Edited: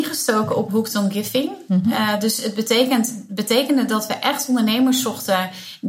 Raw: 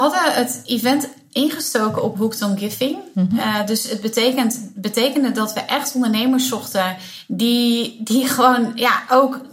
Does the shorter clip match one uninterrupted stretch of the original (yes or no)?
yes